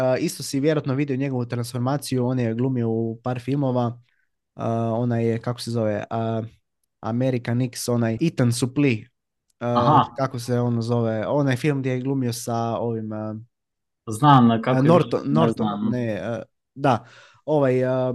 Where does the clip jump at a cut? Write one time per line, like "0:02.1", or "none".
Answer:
0:08.2